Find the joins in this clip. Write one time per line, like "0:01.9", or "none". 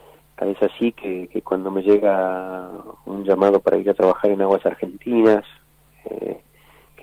none